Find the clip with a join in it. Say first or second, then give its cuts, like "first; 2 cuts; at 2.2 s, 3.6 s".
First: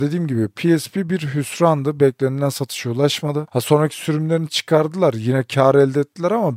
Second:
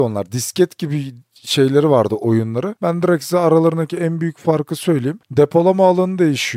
second; 1 cut; at 2.8 s